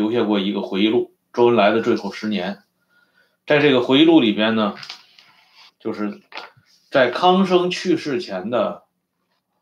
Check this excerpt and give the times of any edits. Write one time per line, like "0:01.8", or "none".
0:05.7